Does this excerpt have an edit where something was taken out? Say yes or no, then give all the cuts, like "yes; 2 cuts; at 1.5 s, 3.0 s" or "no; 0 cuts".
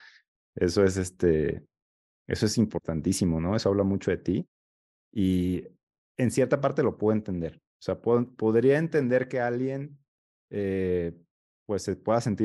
no; 0 cuts